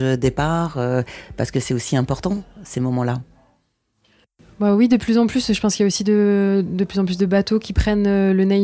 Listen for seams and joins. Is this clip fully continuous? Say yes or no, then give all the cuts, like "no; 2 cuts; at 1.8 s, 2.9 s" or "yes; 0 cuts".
yes; 0 cuts